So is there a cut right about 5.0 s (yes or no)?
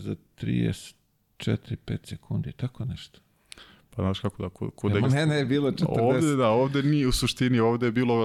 yes